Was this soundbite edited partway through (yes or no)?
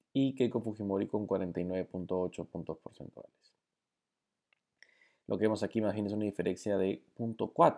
no